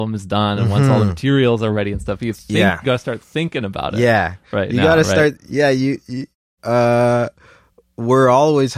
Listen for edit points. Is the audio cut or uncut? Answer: cut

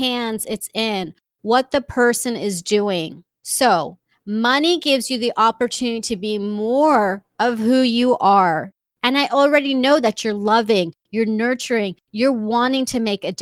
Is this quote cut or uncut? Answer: uncut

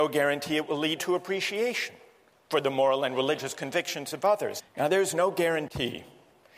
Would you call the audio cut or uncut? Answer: cut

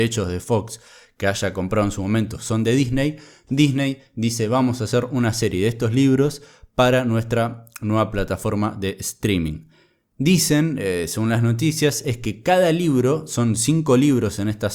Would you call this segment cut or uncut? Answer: uncut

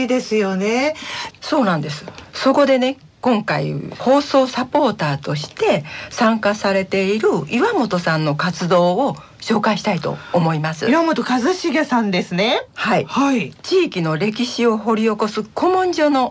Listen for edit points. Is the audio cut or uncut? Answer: cut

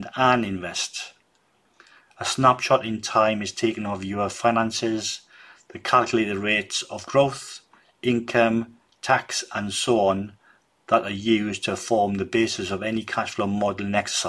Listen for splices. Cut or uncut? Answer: uncut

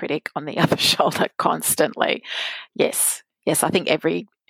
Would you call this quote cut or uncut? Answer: uncut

